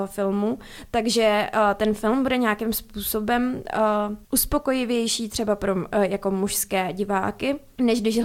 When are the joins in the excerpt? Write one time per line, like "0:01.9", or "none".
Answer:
none